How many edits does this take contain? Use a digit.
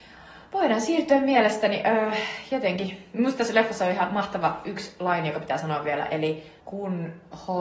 1